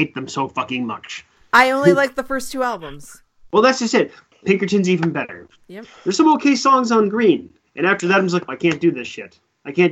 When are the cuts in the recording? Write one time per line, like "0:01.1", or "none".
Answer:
0:04.3
0:08.5